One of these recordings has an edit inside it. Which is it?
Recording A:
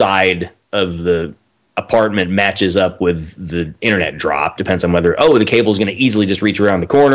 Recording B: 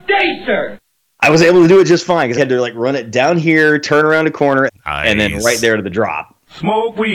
B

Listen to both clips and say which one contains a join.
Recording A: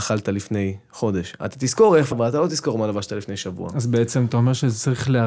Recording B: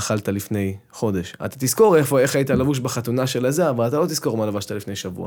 A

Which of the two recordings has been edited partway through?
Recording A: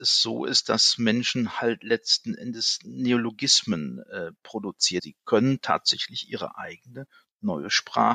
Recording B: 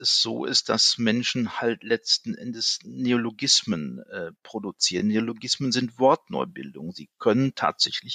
A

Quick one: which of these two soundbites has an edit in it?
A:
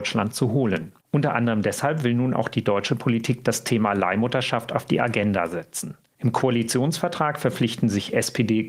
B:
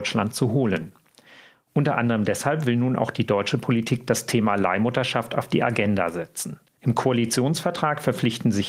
A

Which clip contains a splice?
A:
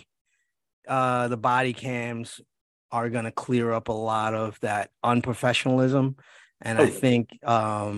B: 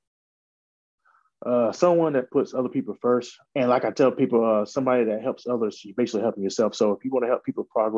B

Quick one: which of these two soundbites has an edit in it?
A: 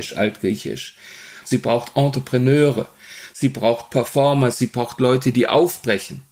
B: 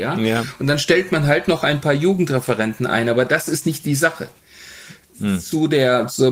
A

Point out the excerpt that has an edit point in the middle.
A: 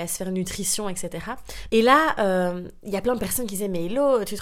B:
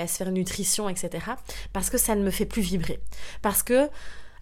A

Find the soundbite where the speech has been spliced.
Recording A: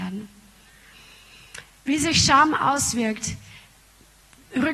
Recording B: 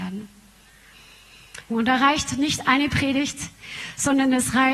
B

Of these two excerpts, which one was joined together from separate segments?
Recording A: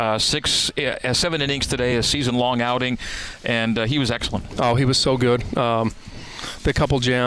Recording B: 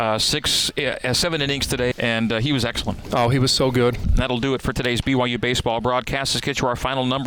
B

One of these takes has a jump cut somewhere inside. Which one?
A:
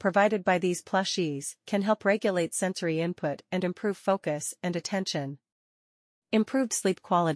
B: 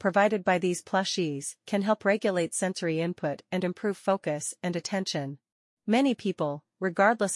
B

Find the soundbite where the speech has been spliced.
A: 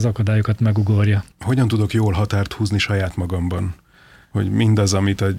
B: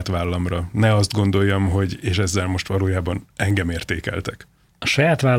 A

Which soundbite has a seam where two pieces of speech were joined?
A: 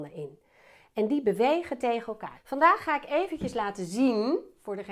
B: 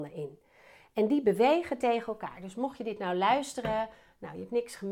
A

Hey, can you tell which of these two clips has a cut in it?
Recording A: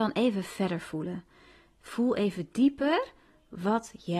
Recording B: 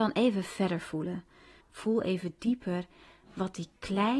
B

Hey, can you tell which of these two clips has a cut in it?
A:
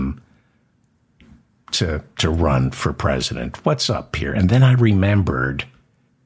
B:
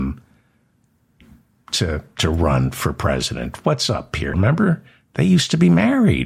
B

